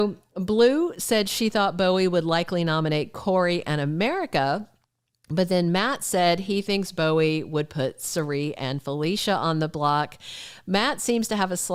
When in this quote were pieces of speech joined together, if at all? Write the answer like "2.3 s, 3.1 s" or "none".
none